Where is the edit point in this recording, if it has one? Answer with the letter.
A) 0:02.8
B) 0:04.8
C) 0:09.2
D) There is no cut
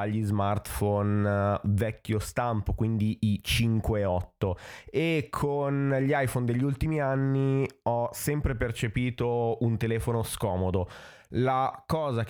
D